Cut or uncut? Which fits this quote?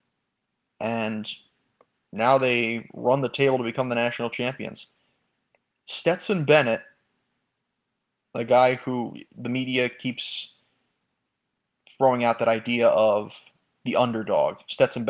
uncut